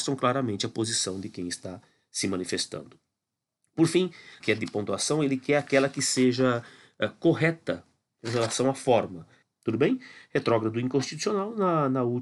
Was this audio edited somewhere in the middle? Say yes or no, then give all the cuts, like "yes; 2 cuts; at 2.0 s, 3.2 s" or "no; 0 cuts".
yes; 2 cuts; at 4.4 s, 9.4 s